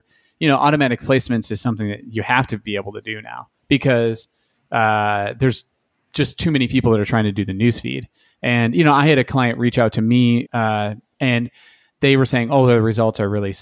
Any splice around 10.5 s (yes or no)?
yes